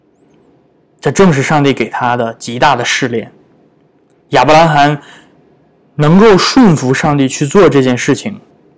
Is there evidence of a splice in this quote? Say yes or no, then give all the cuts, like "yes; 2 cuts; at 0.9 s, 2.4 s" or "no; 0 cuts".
no; 0 cuts